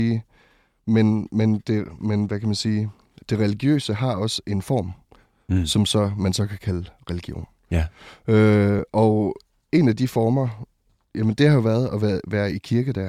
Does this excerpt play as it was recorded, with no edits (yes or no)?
yes